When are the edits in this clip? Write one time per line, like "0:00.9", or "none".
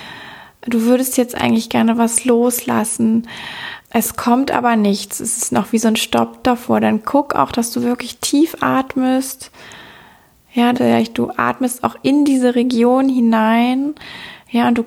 0:10.7

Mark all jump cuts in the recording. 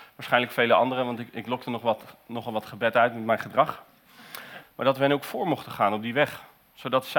0:04.6

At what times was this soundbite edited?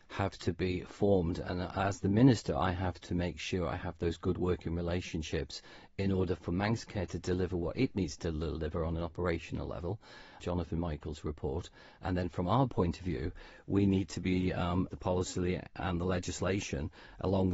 0:10.4
0:14.9

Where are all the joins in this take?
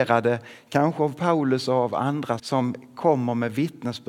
0:02.4

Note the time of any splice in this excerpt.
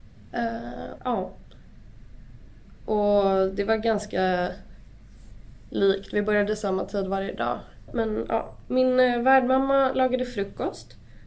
0:01.0
0:07.9

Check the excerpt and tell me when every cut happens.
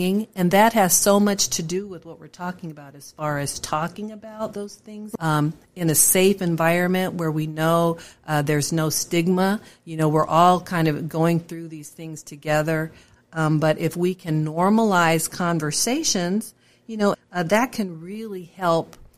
0:05.2
0:13.2
0:17.1

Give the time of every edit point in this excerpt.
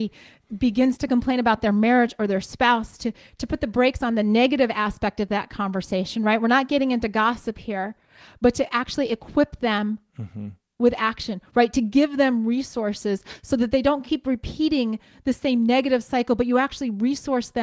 none

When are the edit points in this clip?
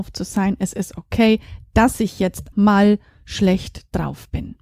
0:02.5

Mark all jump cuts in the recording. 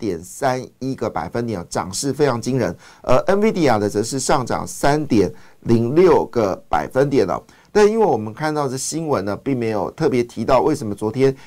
none

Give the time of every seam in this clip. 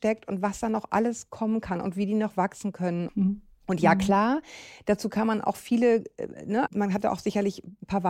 0:03.1
0:06.7

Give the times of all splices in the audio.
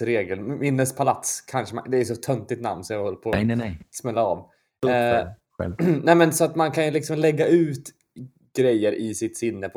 none

